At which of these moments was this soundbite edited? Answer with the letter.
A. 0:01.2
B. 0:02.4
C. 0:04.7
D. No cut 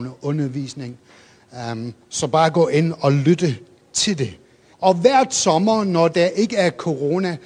C